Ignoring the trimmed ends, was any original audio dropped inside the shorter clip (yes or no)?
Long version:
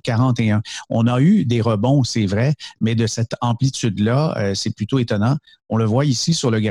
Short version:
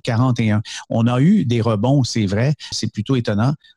yes